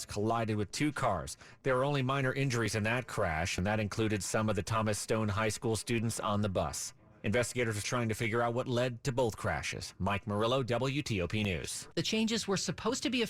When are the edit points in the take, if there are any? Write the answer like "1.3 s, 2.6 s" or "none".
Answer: 7.8 s, 11.9 s

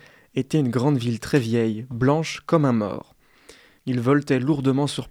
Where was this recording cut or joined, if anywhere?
3.8 s

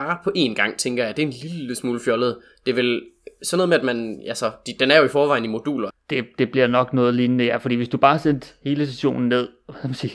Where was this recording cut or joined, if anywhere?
5.9 s

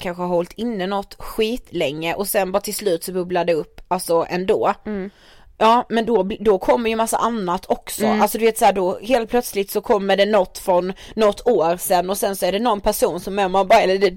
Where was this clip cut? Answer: none

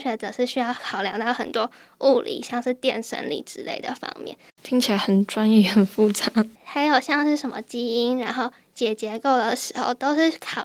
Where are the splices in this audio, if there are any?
4.5 s, 6.5 s

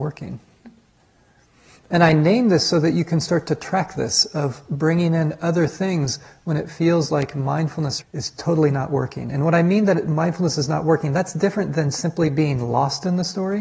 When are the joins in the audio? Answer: 8.0 s

